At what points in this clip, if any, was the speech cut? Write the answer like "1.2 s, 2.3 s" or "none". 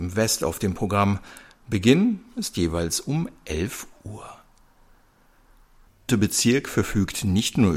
6.1 s

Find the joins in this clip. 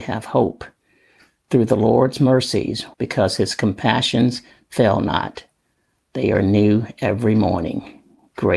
2.9 s

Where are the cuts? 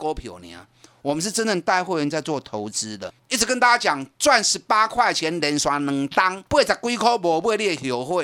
3.2 s, 6.5 s

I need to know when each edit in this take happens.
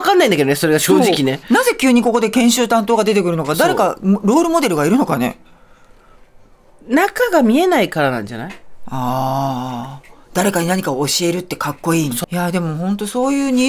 12.2 s

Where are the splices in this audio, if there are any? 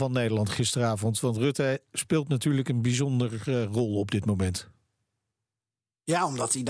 none

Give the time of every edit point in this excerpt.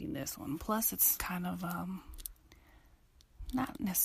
1.2 s

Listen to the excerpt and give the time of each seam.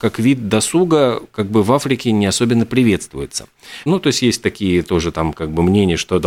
3.9 s

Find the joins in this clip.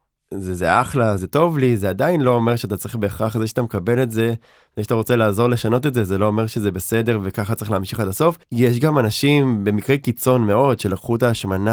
1.2 s, 8.4 s

